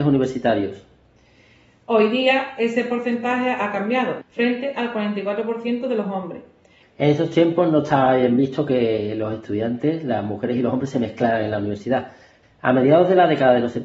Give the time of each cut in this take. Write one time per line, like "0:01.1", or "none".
0:04.2
0:06.8
0:12.4